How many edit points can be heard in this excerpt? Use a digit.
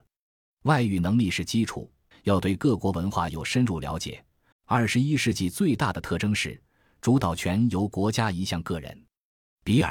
2